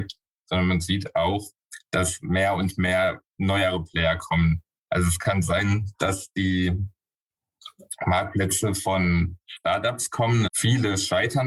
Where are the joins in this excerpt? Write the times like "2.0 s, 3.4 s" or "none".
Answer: 10.5 s